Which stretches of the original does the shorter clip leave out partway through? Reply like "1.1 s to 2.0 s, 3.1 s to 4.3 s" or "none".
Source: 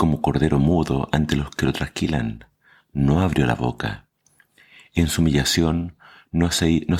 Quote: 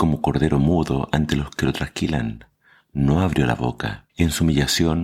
4.1 s to 4.9 s